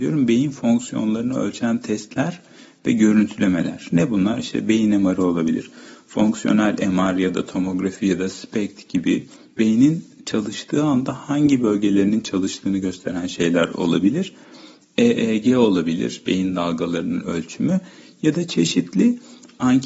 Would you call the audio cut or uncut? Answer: uncut